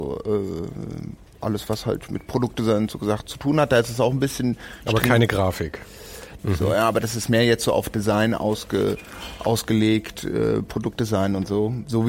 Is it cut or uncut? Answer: cut